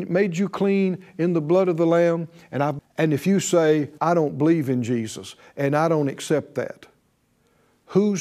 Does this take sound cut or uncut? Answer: cut